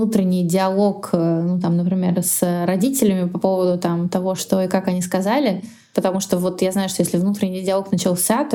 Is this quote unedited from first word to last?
no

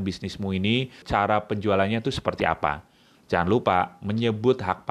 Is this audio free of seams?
no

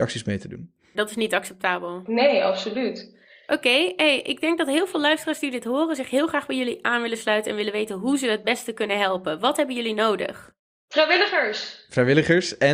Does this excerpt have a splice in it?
yes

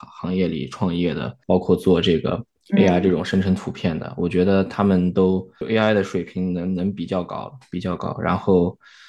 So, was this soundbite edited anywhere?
yes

